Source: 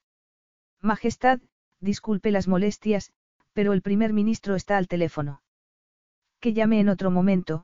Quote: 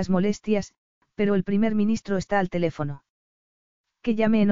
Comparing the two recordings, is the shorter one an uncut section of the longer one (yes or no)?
yes